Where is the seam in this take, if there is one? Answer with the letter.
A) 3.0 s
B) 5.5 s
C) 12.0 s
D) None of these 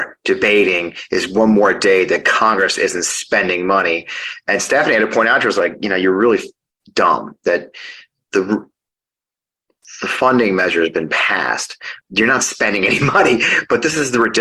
C